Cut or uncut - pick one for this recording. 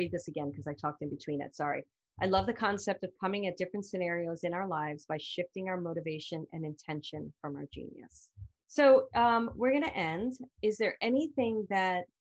cut